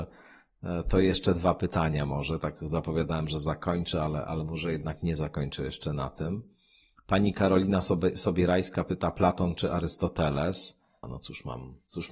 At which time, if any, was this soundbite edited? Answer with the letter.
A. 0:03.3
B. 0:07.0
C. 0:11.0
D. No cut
C